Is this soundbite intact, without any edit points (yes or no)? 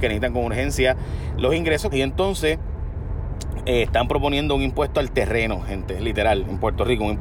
no